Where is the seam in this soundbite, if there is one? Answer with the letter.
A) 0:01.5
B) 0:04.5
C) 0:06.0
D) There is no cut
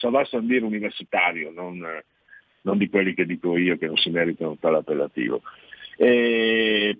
D